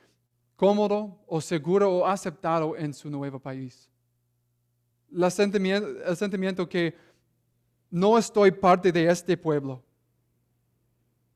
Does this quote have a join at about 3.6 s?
no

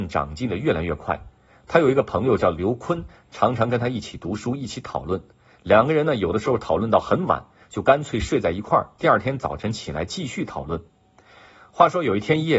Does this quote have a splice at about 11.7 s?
no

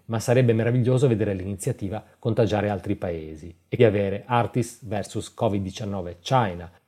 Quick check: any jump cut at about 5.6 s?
no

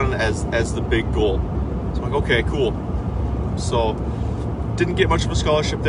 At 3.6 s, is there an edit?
yes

